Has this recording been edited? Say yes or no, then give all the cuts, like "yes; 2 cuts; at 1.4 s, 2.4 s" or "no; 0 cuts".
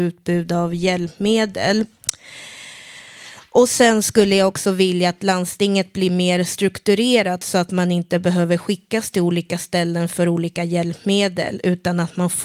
no; 0 cuts